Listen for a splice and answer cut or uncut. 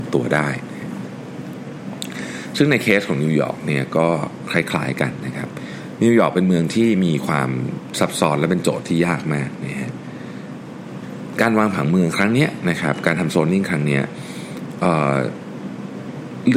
uncut